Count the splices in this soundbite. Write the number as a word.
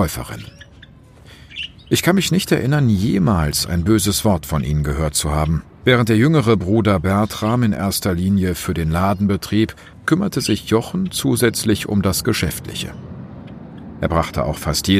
two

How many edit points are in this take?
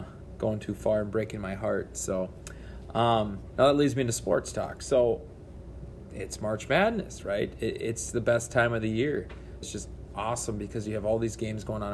two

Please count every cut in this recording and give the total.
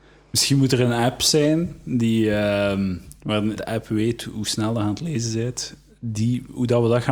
one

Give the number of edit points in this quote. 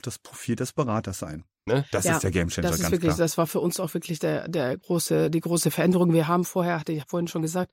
one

